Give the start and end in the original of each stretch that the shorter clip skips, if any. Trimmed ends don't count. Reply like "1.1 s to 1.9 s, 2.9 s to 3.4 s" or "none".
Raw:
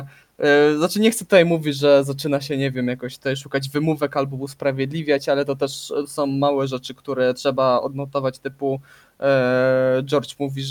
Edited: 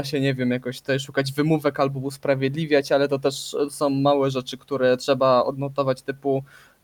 none